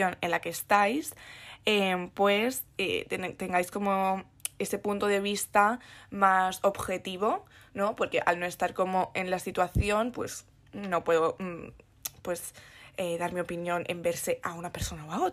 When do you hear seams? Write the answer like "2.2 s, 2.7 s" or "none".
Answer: none